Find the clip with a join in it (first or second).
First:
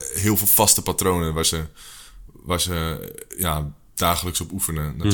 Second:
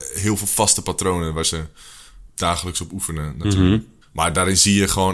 second